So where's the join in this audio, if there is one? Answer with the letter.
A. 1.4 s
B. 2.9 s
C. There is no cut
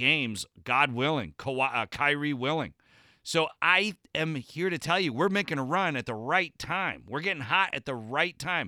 C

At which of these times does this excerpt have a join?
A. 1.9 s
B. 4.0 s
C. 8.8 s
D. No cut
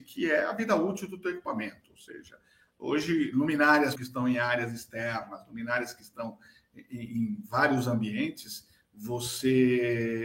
B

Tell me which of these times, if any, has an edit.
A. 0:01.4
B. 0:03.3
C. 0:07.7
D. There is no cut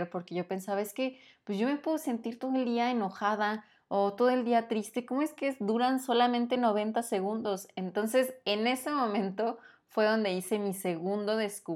D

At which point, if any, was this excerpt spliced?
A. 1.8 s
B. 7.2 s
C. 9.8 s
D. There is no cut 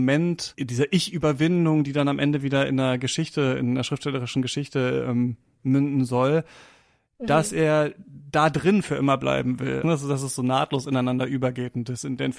C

